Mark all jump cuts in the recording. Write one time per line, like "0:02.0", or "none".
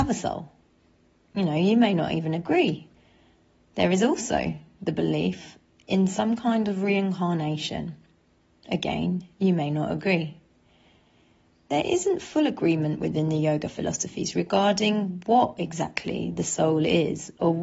none

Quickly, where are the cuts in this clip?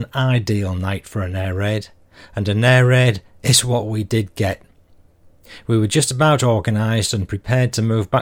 none

